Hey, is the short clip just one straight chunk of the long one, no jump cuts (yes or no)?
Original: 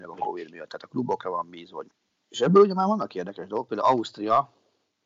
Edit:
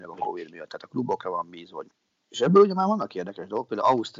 yes